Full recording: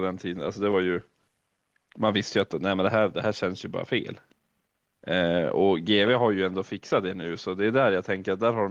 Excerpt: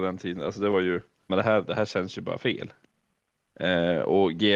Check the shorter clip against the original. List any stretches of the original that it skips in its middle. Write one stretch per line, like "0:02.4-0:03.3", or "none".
0:01.3-0:02.8